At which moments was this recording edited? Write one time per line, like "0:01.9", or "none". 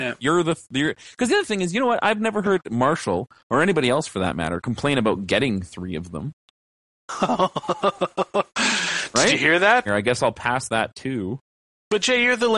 0:09.9